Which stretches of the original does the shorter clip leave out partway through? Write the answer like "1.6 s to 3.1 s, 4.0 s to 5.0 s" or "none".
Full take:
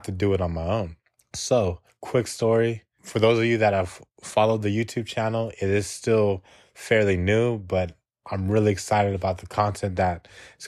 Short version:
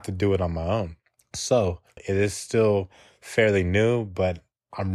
2.0 s to 5.5 s